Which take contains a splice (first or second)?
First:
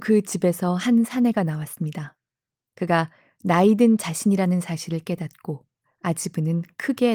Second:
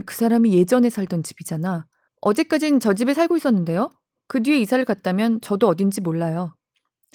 second